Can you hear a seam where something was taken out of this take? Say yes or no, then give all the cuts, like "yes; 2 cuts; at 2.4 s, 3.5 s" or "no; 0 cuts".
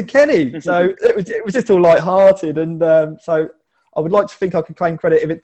no; 0 cuts